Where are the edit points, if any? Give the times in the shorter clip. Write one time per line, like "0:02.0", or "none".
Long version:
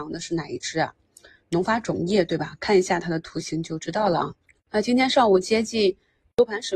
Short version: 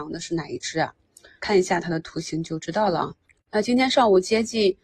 0:01.4